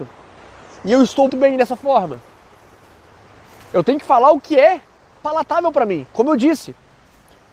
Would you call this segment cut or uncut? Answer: cut